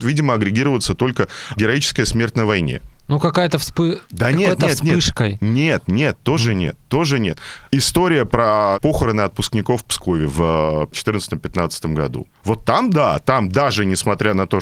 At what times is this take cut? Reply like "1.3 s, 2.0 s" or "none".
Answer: none